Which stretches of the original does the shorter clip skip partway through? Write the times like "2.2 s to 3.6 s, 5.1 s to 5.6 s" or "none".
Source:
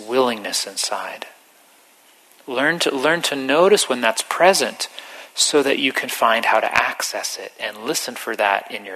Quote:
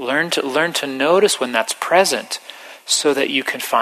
none

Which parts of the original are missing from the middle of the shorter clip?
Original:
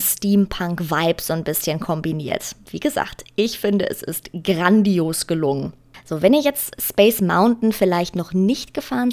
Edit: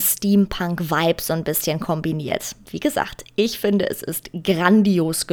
none

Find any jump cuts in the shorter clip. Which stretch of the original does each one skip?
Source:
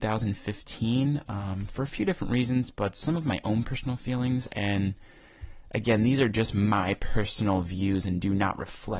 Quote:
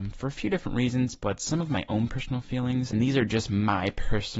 4.5 s to 6.0 s

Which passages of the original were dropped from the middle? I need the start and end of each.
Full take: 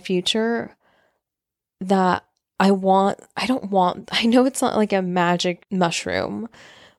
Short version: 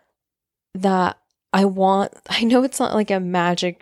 3.3 s to 4.1 s

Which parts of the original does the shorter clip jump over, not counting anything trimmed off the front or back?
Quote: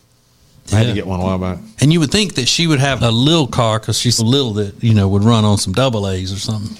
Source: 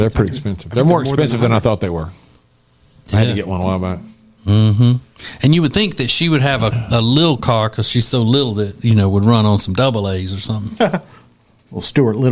4.2 s to 5.4 s, 6.6 s to 6.9 s, 8.1 s to 8.2 s

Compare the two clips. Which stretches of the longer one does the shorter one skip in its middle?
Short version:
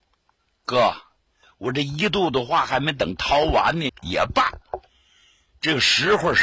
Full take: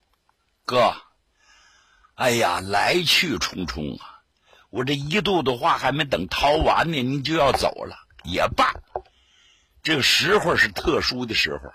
1.4 s to 4.5 s, 7.0 s to 8.1 s

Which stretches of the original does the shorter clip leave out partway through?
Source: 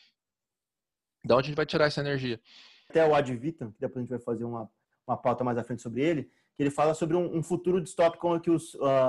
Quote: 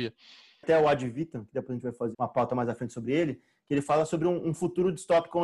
4.4 s to 5.0 s

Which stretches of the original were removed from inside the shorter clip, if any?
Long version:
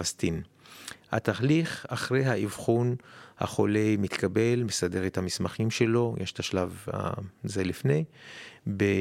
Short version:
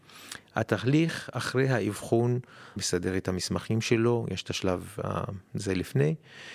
3.3 s to 4.7 s

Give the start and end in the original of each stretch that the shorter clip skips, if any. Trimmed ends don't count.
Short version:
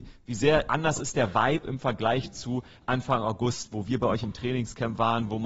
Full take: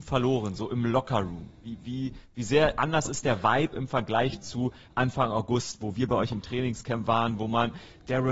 none

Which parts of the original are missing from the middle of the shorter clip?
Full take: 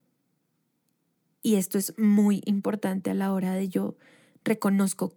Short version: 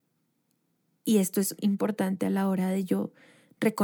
1.9 s to 2.4 s

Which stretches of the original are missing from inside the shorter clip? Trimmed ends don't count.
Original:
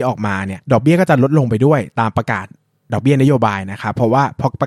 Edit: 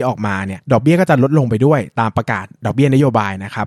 2.5 s to 2.8 s

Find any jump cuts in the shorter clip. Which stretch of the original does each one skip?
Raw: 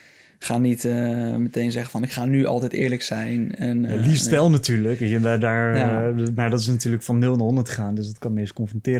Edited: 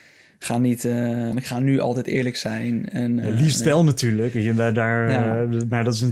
1.3 s to 2.0 s

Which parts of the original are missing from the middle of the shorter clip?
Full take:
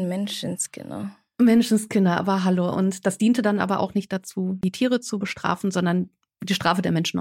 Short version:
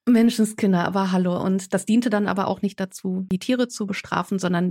none

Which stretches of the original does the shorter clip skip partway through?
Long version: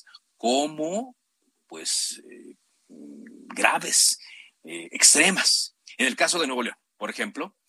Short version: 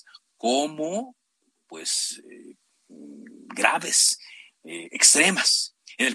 none

